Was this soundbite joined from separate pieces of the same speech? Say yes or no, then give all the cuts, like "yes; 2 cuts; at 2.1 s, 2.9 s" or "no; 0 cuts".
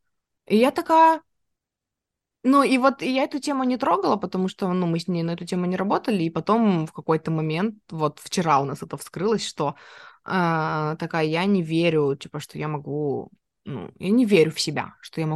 no; 0 cuts